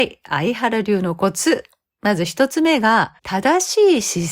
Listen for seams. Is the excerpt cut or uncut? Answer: cut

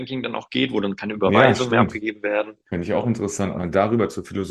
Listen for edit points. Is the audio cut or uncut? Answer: uncut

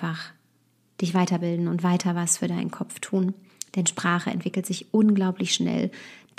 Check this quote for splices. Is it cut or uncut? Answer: uncut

